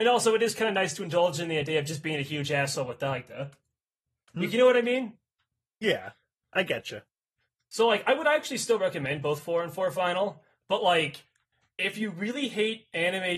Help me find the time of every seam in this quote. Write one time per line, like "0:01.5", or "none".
none